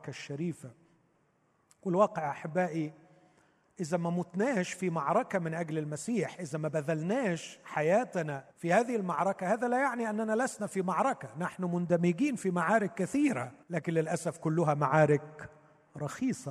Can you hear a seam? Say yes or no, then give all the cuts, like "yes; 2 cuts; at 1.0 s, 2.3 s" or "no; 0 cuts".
yes; 2 cuts; at 8.5 s, 13.6 s